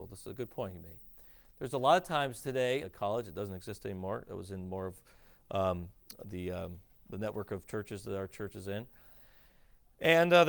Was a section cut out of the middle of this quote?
yes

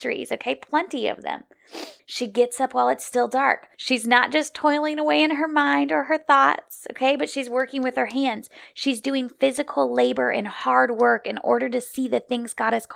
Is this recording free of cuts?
no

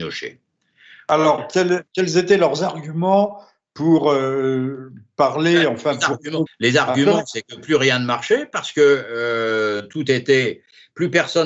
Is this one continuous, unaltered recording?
no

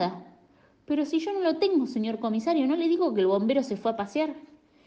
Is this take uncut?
yes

